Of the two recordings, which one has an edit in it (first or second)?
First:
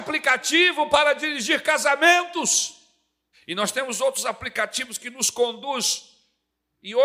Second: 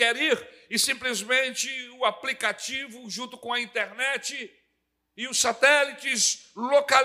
first